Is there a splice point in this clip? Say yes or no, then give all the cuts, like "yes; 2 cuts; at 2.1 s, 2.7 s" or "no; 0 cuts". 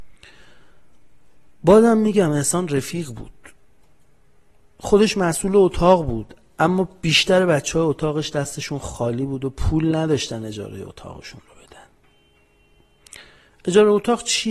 no; 0 cuts